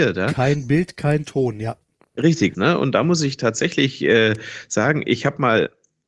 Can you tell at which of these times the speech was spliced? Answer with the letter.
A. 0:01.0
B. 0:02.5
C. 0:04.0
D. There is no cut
B